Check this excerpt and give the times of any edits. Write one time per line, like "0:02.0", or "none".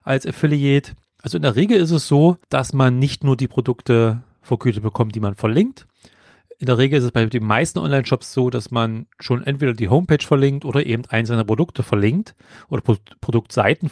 0:01.1